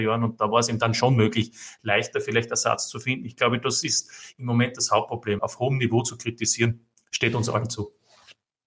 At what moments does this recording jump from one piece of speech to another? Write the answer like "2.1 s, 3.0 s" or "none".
5.4 s